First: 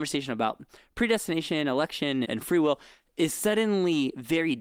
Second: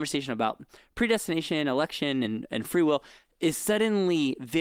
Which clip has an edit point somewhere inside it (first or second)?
first